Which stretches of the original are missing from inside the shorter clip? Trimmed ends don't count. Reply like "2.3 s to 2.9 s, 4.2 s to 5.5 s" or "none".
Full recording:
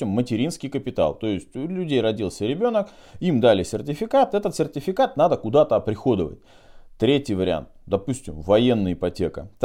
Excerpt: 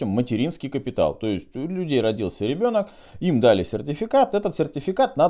none